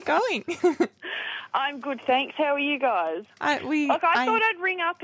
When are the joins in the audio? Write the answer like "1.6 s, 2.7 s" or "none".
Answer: 3.3 s